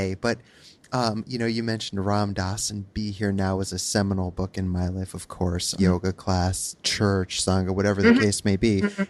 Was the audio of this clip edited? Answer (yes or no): yes